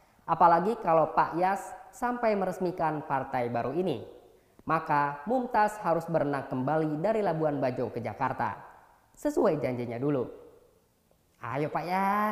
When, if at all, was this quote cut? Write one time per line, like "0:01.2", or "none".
none